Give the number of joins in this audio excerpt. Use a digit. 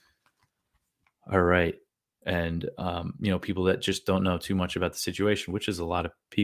1